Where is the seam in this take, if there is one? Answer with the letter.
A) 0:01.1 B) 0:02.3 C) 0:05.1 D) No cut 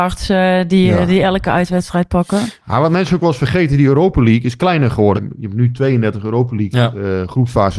C